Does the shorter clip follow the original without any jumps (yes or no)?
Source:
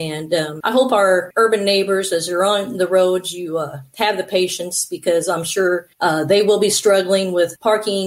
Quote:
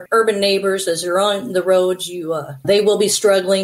no